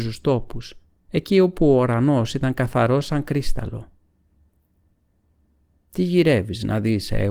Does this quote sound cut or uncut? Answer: cut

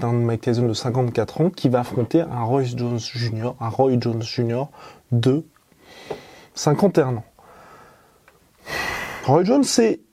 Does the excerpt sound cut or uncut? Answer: uncut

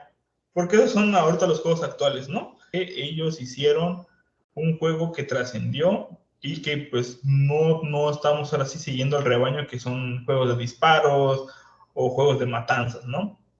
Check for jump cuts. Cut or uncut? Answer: cut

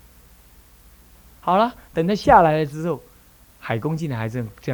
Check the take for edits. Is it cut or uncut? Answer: cut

